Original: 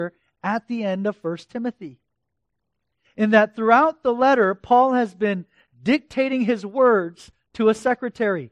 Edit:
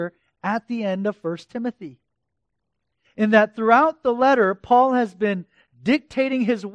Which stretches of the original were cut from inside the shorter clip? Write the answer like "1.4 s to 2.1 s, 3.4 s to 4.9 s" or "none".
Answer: none